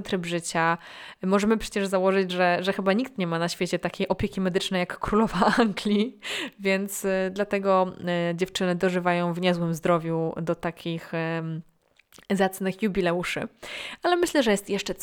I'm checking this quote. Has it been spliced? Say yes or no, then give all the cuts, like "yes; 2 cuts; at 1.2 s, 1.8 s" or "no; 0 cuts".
no; 0 cuts